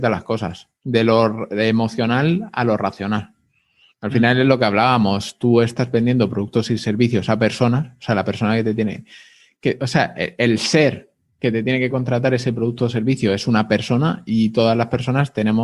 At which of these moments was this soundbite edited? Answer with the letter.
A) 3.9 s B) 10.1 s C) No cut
A